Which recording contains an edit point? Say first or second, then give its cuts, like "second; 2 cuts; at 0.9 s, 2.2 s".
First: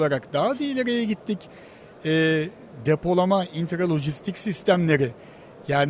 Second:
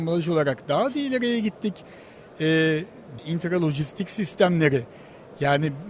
second; 1 cut; at 3.2 s